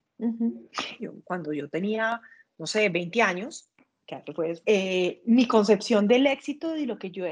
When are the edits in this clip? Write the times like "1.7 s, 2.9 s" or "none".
1.0 s, 4.6 s